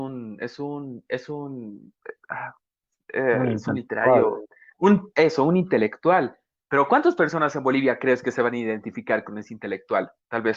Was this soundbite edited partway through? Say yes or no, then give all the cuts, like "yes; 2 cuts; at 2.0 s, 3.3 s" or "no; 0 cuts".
no; 0 cuts